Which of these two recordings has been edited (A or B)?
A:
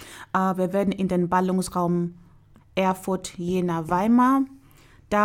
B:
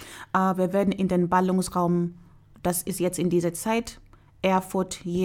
A